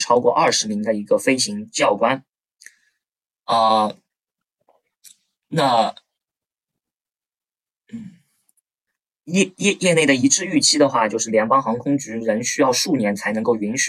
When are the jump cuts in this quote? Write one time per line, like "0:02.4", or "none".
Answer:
none